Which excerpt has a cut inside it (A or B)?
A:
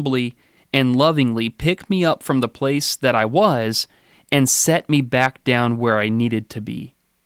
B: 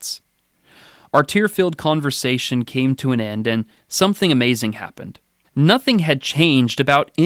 B